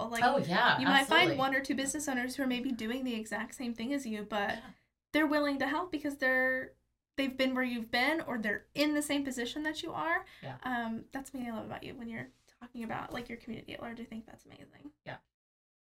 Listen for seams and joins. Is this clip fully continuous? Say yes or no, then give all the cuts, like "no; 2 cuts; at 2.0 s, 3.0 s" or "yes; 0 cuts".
yes; 0 cuts